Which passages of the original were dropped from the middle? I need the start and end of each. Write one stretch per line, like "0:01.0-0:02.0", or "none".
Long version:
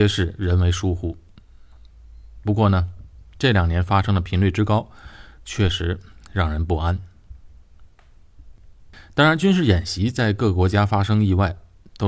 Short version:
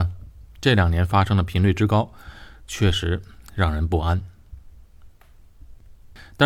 none